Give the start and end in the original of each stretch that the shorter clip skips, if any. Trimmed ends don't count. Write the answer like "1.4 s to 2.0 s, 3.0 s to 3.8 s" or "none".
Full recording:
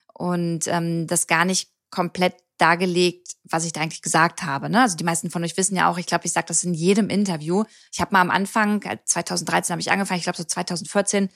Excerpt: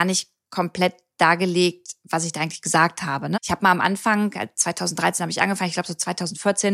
4.7 s to 7.8 s